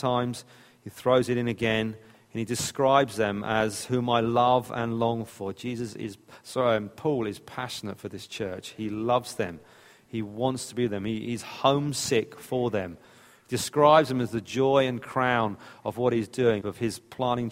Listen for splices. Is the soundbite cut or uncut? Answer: cut